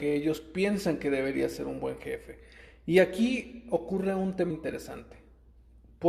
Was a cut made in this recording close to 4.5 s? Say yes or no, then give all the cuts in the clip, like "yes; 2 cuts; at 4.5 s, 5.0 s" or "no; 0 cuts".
yes; 1 cut; at 4.5 s